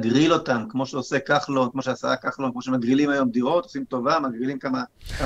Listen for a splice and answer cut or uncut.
uncut